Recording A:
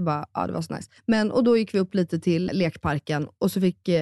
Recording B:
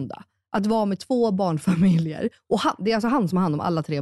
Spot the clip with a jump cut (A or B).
A